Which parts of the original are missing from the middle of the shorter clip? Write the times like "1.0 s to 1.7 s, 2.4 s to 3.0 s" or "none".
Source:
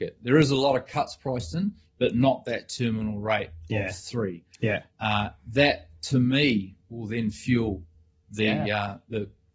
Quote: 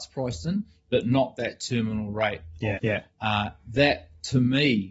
3.9 s to 4.6 s